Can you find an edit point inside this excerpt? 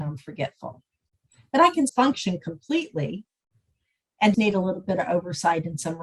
yes; 2 cuts; at 1.9 s, 4.3 s

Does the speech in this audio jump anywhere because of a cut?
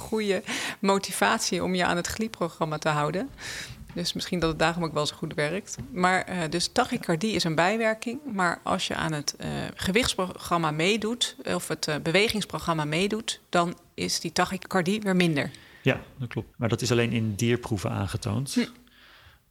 yes; 1 cut; at 16.5 s

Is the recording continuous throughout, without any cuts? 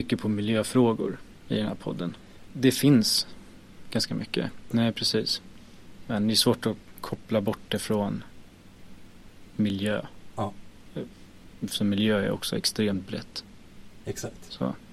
no; 2 cuts; at 2.5 s, 4.7 s

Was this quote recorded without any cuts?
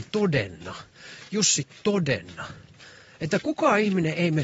yes; 0 cuts

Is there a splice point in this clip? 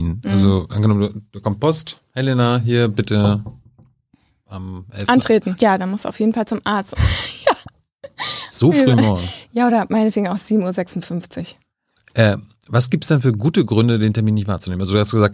yes; 2 cuts; at 5.6 s, 6.9 s

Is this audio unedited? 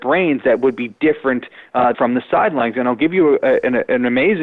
no; 1 cut; at 1.9 s

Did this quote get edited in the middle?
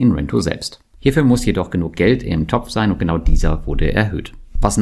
yes; 1 cut; at 0.9 s

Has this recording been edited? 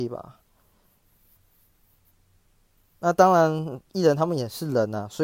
no; 0 cuts

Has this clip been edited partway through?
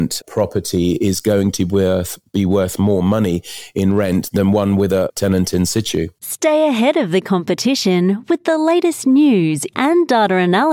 yes; 1 cut; at 9.7 s

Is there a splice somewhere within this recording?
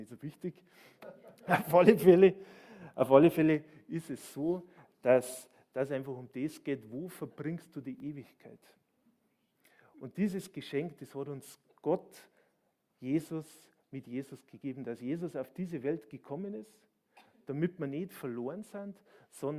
no; 0 cuts

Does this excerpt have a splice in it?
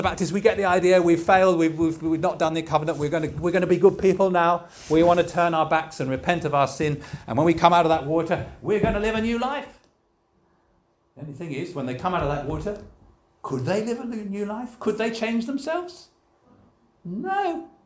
no; 0 cuts

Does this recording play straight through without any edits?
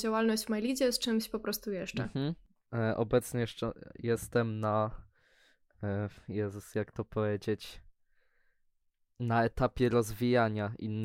yes; 0 cuts

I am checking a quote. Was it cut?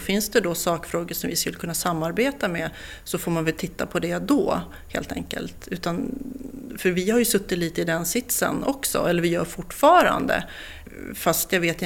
no; 0 cuts

